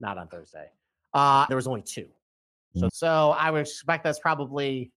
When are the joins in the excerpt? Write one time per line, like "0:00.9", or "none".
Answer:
0:01.5
0:02.9